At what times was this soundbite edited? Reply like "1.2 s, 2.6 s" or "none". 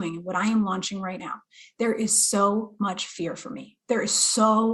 none